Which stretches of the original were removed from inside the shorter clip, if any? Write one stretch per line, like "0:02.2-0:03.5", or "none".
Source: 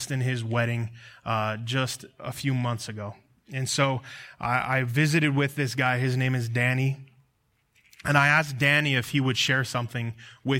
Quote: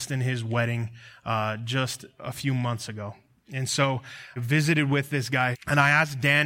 0:04.4-0:04.8
0:06.0-0:07.9